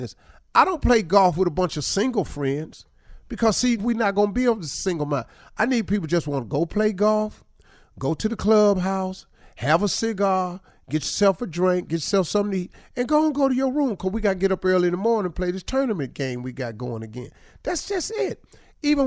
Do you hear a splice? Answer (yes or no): yes